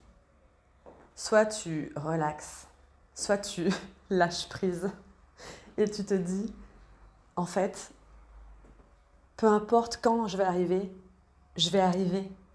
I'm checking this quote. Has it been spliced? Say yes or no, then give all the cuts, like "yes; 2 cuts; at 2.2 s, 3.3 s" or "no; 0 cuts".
no; 0 cuts